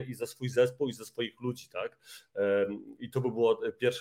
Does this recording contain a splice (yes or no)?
no